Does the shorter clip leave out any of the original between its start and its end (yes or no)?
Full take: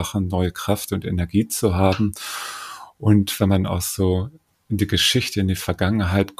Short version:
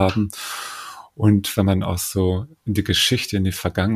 yes